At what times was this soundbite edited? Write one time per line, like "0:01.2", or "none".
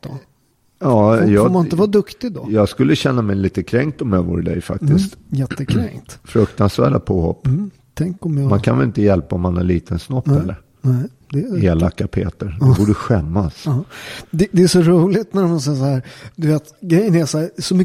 none